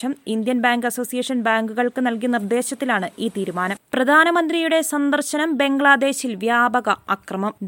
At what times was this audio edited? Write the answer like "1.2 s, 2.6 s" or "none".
none